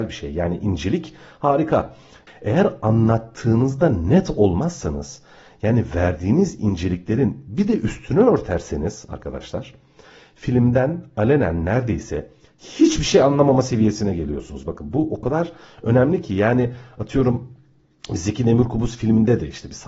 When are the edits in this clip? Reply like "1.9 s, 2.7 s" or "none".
none